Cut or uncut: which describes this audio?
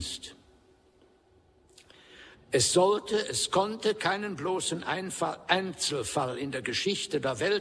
cut